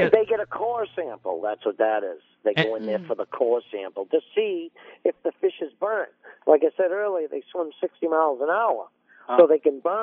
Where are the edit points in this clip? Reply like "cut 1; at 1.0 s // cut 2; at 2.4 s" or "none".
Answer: none